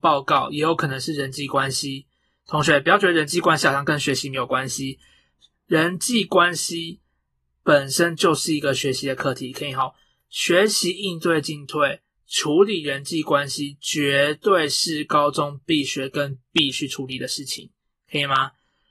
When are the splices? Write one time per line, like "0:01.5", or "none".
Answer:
none

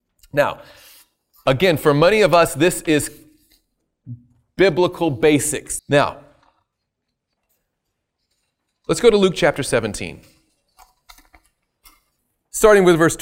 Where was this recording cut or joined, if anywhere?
0:05.8

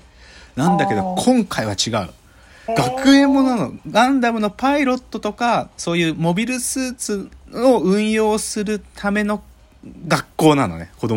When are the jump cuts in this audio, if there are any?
0:02.7

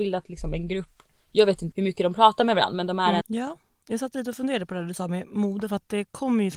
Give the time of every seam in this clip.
0:01.7
0:03.2

